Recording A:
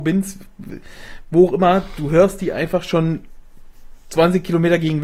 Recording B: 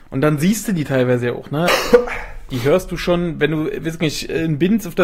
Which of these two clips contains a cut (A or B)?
B